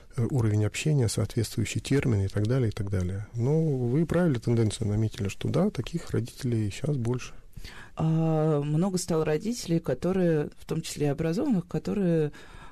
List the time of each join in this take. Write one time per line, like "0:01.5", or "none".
0:03.3
0:07.9